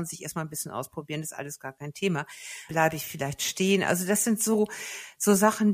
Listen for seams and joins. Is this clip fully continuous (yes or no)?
no